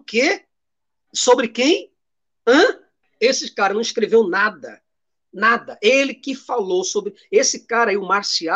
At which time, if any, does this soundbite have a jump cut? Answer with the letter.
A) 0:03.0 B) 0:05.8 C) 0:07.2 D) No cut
A